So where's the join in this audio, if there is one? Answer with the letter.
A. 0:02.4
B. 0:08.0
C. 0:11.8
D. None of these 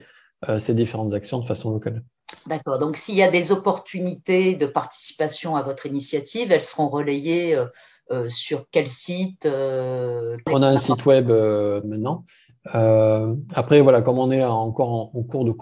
C